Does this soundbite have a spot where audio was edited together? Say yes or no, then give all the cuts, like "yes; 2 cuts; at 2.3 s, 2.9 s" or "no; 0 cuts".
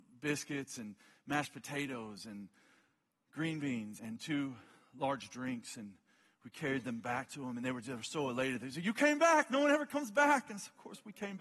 yes; 1 cut; at 4.0 s